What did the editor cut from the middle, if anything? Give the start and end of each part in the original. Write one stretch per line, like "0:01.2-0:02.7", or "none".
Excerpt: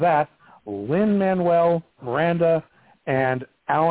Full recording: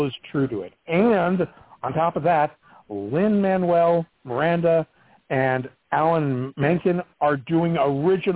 none